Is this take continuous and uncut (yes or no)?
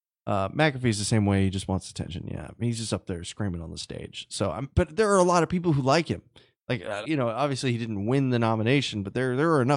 no